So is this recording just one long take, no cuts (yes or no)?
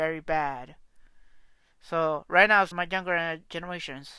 no